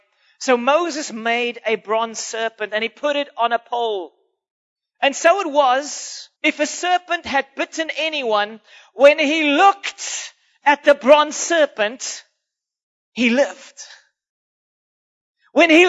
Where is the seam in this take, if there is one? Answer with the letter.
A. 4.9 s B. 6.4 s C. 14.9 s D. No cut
B